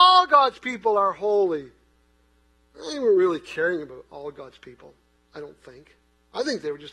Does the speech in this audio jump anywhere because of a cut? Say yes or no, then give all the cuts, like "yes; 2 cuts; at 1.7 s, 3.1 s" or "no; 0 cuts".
no; 0 cuts